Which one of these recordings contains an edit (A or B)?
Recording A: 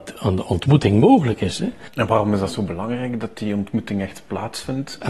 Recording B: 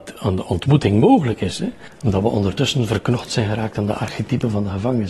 B